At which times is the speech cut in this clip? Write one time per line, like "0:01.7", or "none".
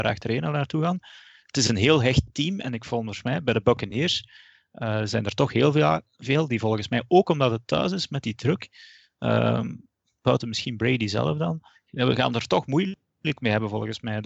none